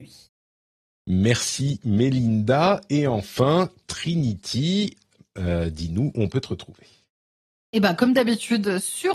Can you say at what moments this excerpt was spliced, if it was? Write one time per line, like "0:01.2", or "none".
none